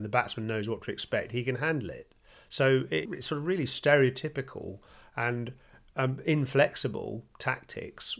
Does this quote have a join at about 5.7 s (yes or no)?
no